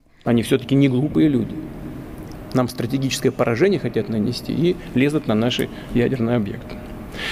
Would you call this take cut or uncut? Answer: uncut